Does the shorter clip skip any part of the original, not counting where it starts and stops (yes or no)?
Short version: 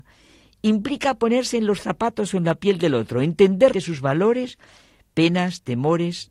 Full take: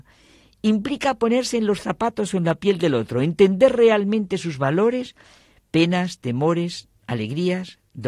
yes